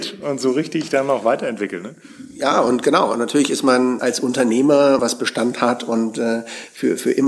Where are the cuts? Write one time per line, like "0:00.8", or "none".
0:04.0
0:05.0